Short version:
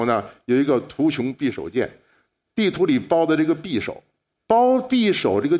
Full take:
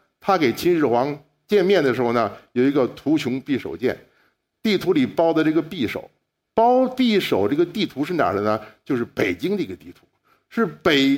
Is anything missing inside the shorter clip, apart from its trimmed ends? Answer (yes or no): no